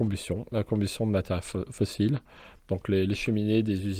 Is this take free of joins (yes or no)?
yes